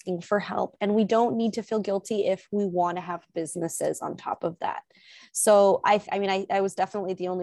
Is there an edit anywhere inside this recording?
yes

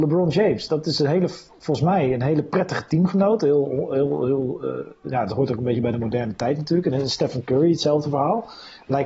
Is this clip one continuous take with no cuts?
yes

